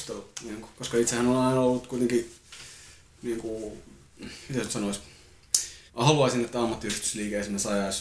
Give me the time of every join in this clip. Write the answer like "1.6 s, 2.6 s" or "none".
5.9 s